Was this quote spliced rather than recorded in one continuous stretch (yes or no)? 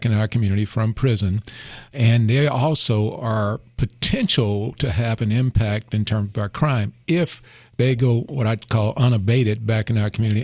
yes